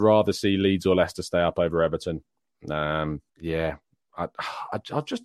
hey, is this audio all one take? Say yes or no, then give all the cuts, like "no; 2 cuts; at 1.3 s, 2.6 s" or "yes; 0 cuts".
no; 1 cut; at 3.3 s